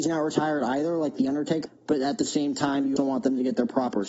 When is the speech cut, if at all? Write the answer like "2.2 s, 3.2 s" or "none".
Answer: 1.7 s, 3.0 s